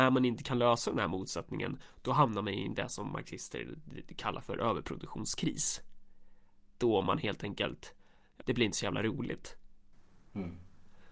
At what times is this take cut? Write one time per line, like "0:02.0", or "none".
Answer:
0:08.4